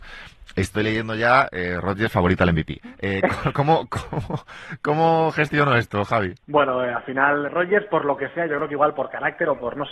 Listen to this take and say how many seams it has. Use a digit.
2